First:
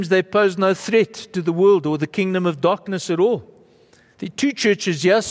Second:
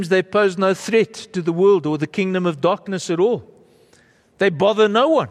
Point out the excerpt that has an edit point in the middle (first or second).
first